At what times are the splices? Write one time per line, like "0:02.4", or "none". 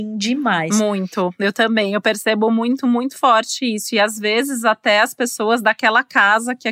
none